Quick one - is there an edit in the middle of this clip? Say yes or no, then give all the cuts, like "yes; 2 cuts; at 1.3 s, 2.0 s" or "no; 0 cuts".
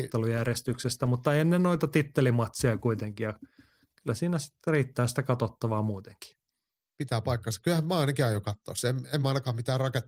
no; 0 cuts